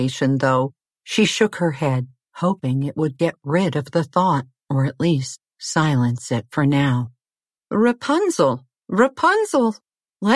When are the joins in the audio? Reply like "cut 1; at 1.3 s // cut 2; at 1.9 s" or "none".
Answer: none